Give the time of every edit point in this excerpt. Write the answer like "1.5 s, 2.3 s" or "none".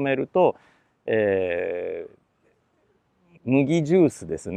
3.3 s